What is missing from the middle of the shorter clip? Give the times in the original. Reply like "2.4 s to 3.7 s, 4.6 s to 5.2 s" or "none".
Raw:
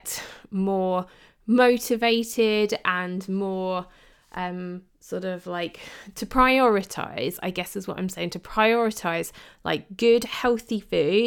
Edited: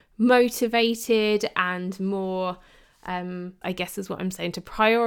4.9 s to 7.4 s